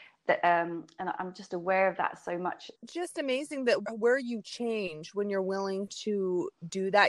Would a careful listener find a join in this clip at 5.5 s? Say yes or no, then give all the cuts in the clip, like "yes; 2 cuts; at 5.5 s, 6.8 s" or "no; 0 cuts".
no; 2 cuts; at 2.7 s, 3.8 s